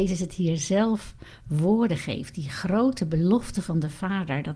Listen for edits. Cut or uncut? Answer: uncut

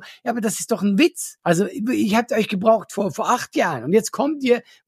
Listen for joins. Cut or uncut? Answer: uncut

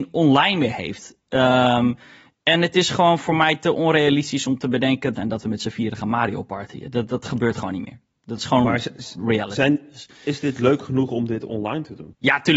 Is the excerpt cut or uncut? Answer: cut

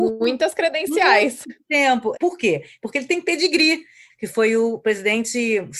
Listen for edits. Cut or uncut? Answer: cut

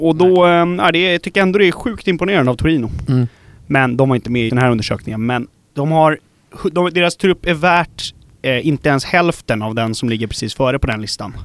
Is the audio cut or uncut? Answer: cut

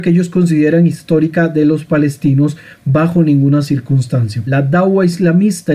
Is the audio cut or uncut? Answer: cut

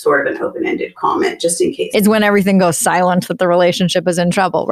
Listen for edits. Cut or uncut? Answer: cut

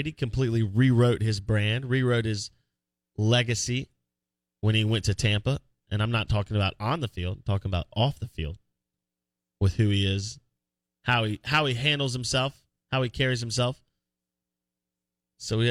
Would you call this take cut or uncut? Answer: uncut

